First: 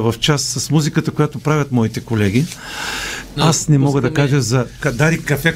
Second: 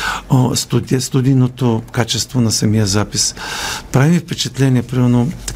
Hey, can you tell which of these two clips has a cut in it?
first; 1 cut; at 3.4 s

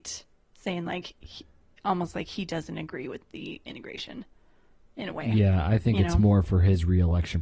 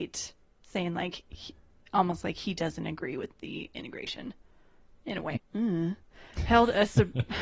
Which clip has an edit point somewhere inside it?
second; 1 cut; at 5.4 s

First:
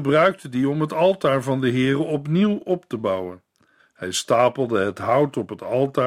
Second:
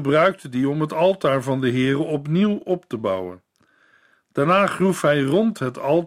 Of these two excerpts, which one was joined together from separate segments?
first; 1 cut; at 3.8 s

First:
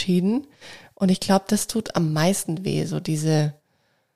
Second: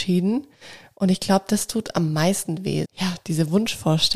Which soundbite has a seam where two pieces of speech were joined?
second; 1 cut; at 2.8 s

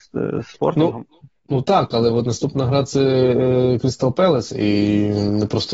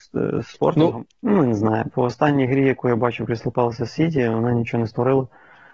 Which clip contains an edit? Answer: second; 1 cut; at 1.1 s

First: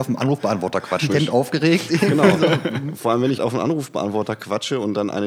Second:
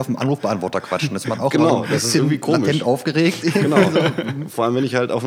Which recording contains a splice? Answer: first; 2 cuts; at 1.1 s, 3.4 s

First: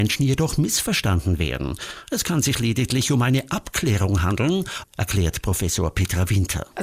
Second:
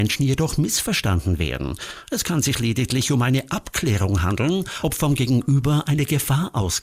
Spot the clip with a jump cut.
first; 1 cut; at 4.8 s

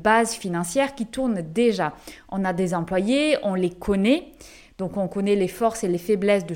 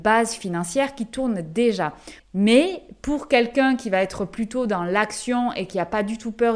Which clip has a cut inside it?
second; 1 cut; at 2.2 s

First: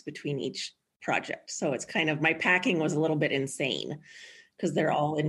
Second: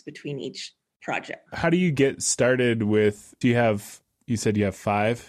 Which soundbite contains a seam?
second; 2 cuts; at 1.5 s, 3.4 s

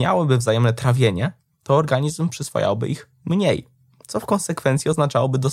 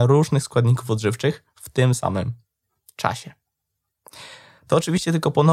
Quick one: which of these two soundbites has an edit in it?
second; 1 cut; at 4.6 s

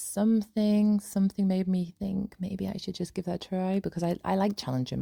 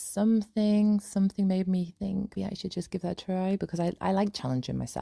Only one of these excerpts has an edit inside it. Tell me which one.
second; 1 cut; at 2.4 s

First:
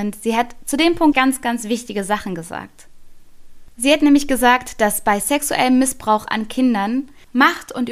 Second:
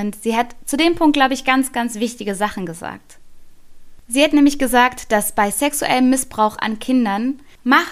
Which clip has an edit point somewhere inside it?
first; 1 cut; at 1.1 s

